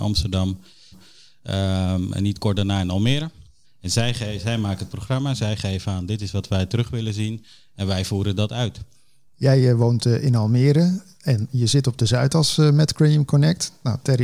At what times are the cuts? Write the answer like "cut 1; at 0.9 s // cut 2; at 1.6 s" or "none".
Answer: cut 1; at 0.9 s // cut 2; at 3.6 s // cut 3; at 9.3 s